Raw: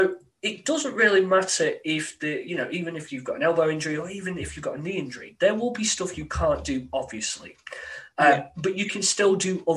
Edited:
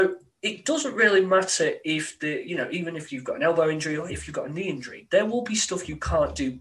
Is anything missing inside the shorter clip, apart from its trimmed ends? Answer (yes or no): yes